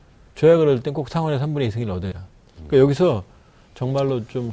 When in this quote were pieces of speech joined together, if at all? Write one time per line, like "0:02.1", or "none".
0:02.1